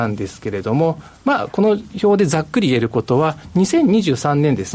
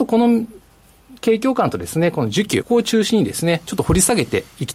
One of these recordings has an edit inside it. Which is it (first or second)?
second